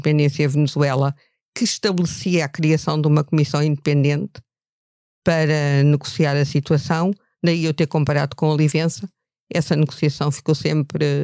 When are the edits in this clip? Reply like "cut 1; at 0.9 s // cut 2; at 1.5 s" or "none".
none